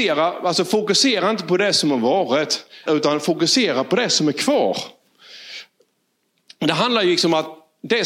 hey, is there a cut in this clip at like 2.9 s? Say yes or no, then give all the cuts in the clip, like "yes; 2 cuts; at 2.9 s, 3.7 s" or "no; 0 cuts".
yes; 1 cut; at 2.9 s